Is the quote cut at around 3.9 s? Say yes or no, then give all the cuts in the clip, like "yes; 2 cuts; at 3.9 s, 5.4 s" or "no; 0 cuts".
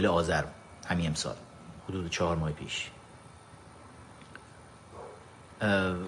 no; 1 cut; at 1.8 s